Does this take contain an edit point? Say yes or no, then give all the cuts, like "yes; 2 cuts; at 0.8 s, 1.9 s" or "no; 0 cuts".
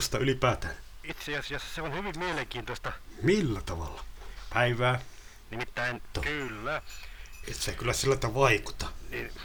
yes; 3 cuts; at 4.5 s, 6.1 s, 7.4 s